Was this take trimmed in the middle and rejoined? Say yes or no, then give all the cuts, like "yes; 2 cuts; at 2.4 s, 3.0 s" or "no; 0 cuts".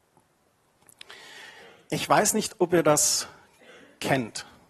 no; 0 cuts